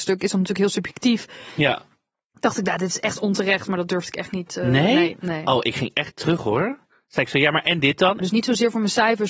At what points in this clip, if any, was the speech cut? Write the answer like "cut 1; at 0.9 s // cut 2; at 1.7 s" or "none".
cut 1; at 8.2 s